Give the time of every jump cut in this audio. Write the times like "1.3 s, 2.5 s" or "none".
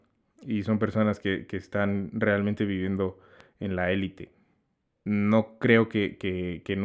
none

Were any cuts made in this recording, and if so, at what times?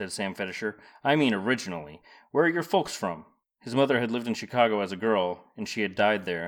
3.4 s

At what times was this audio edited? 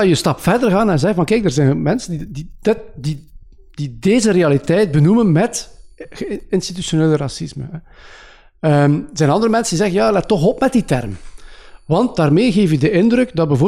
none

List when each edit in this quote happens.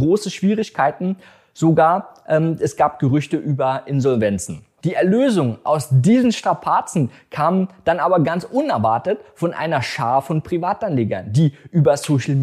4.8 s

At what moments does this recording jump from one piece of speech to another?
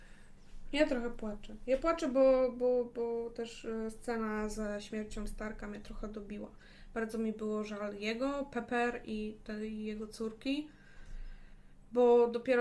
none

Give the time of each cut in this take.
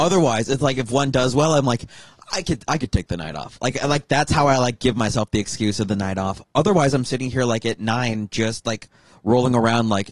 none

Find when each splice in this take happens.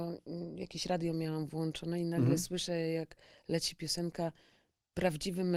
none

